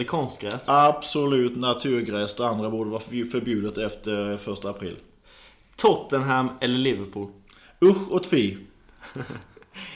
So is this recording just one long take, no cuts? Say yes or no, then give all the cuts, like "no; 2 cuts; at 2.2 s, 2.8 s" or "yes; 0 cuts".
yes; 0 cuts